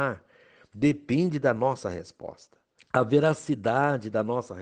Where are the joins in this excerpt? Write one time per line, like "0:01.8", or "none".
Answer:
0:02.8